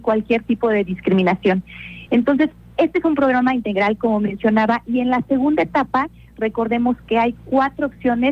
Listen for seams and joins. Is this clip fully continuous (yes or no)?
yes